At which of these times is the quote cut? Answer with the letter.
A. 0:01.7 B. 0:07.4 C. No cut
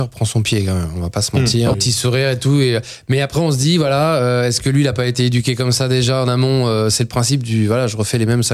A